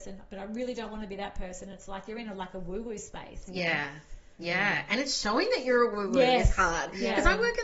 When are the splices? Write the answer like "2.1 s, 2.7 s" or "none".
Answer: none